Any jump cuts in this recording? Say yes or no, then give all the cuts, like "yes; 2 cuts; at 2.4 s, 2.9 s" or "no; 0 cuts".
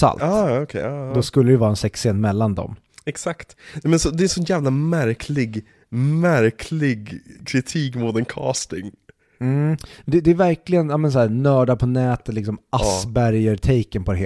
no; 0 cuts